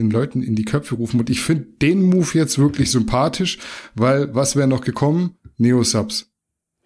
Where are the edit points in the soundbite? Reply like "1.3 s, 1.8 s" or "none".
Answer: none